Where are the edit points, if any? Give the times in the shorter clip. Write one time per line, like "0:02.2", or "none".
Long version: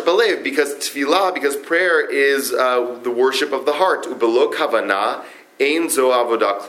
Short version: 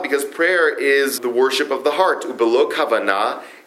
0:01.2